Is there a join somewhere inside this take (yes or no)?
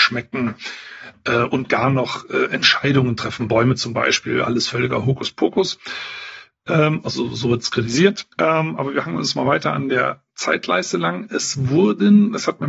yes